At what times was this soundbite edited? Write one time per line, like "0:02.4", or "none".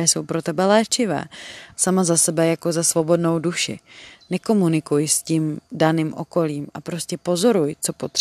0:01.7
0:04.1
0:05.6